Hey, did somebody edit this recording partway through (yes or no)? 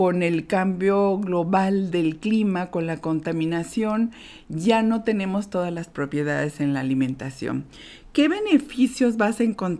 no